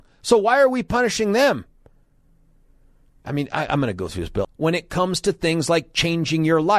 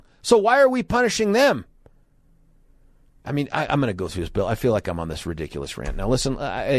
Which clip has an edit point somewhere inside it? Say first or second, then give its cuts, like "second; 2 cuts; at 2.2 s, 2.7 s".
first; 1 cut; at 4.4 s